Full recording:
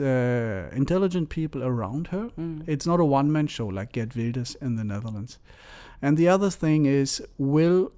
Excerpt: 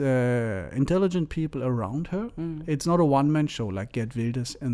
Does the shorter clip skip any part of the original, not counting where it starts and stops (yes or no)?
no